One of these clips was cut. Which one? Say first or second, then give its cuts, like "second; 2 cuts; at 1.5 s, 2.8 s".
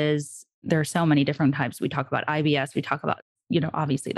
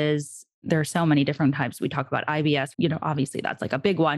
second; 1 cut; at 2.7 s